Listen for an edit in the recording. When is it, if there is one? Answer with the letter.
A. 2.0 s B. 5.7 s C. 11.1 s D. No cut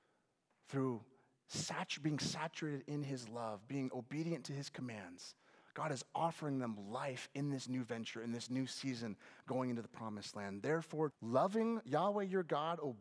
C